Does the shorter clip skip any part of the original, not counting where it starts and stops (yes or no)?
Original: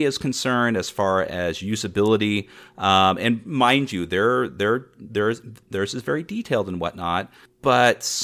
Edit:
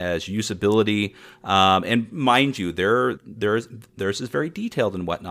yes